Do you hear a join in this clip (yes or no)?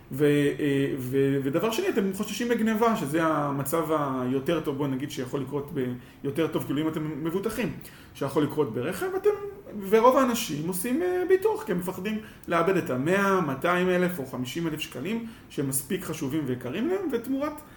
no